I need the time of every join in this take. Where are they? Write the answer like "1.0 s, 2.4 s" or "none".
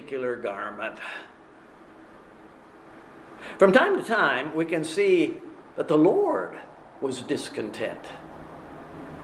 none